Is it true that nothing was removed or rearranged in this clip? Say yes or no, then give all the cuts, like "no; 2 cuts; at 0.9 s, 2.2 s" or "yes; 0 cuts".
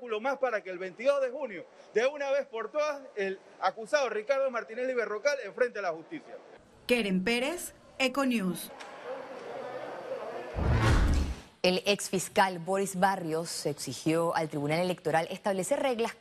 no; 1 cut; at 6.7 s